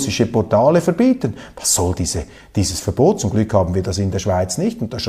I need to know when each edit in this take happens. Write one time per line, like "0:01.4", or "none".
none